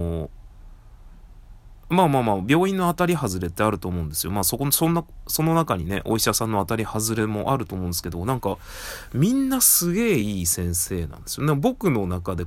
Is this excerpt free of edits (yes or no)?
yes